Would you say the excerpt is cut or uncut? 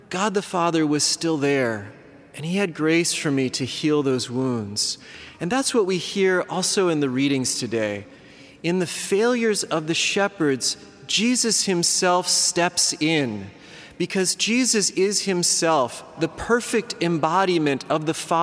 uncut